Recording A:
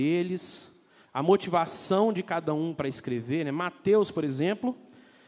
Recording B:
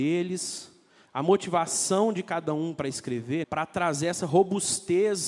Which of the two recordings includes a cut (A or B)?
B